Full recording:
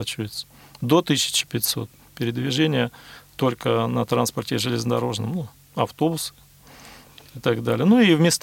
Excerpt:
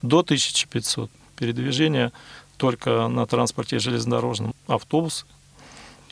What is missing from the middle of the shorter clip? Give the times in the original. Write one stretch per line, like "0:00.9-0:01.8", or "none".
0:05.3-0:05.6